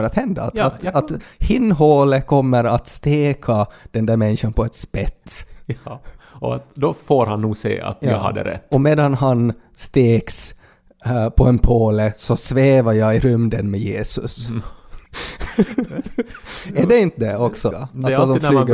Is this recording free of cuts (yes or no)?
no